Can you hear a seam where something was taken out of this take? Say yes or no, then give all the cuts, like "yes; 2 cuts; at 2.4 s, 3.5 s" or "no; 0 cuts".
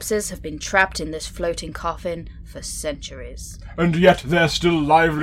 no; 0 cuts